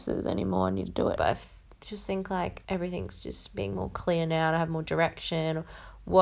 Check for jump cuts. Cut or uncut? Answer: cut